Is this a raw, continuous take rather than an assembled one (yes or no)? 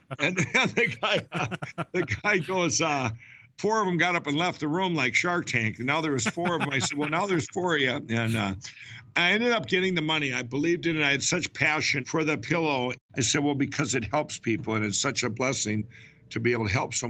no